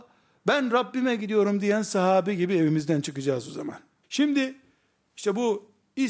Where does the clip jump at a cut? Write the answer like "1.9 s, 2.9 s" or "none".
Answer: 4.0 s